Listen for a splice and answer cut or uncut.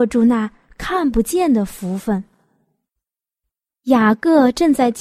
cut